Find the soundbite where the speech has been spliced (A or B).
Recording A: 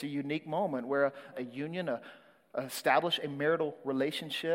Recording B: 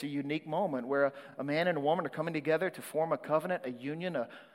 A